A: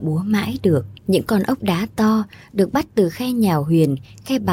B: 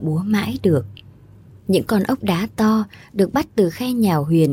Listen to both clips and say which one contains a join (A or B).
A